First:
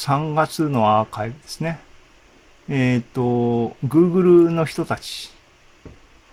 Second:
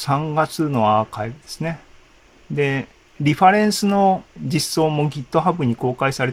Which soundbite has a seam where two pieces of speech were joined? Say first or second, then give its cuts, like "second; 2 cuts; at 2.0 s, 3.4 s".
second; 2 cuts; at 2.4 s, 4.3 s